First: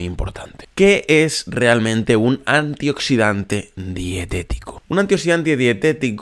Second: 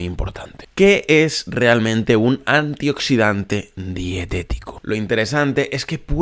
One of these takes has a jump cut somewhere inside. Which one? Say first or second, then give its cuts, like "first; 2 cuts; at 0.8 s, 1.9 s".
second; 1 cut; at 4.8 s